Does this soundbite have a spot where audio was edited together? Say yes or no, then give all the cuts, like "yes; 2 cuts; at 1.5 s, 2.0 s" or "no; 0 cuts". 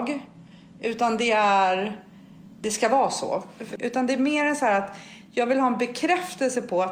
yes; 1 cut; at 3.8 s